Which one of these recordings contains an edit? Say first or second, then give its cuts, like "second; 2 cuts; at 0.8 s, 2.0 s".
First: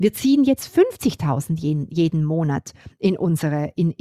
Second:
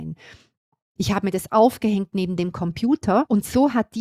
second; 1 cut; at 1.0 s